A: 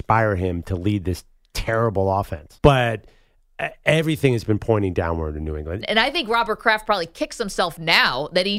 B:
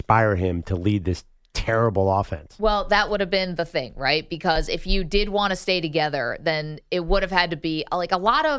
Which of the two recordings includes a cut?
A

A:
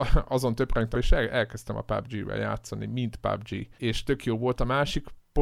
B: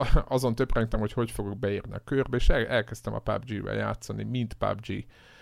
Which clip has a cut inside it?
A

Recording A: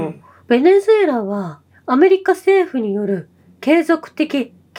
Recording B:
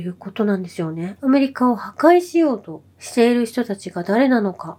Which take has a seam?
B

